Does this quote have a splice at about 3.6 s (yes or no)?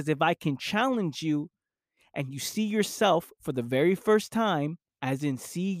no